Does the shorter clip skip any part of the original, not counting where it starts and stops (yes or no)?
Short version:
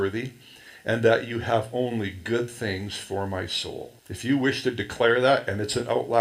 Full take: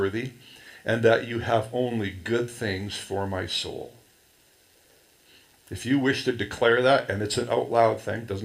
yes